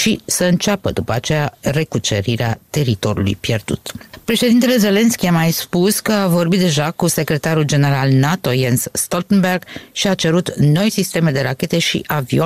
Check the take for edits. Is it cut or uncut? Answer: cut